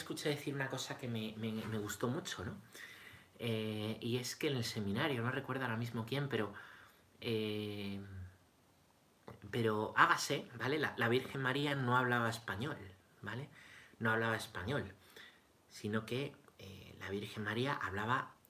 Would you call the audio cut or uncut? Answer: uncut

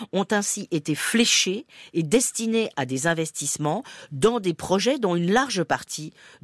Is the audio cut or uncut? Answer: uncut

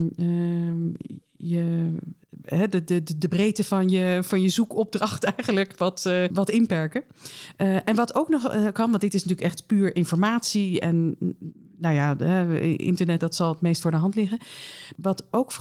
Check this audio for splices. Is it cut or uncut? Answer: cut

